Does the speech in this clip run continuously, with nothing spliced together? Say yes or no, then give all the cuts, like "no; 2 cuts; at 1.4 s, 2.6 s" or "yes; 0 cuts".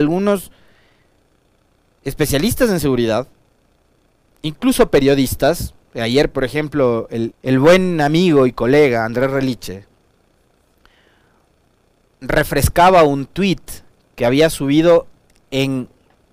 no; 1 cut; at 7.3 s